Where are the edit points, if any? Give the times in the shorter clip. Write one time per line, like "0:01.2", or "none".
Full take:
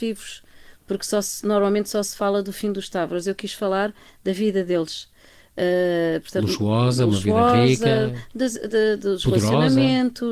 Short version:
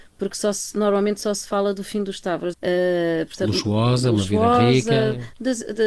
0:02.5